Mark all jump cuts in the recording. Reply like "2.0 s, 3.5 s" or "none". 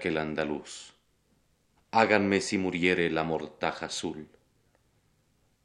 none